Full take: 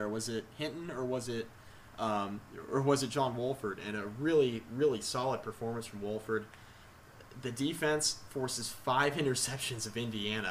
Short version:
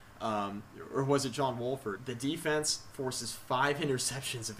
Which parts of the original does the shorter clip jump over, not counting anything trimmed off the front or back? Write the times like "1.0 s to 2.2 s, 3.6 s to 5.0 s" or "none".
3.8 s to 7.3 s